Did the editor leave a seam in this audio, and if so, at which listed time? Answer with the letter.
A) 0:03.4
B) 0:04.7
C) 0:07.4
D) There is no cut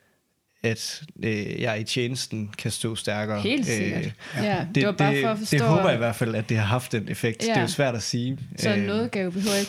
D